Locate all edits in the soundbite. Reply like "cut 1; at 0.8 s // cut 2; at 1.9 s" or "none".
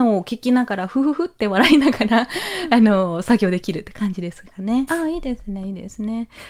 cut 1; at 4.9 s